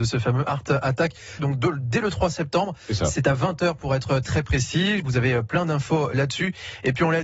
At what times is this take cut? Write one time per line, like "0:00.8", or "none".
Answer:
0:01.4
0:05.0